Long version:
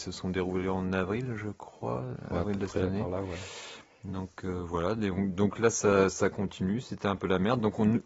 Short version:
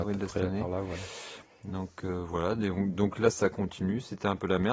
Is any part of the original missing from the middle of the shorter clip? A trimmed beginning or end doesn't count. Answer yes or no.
yes